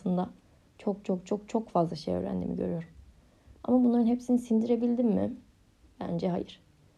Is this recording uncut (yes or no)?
yes